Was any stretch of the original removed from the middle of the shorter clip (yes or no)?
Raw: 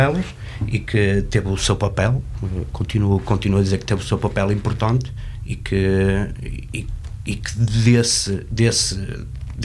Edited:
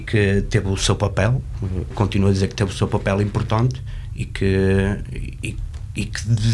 yes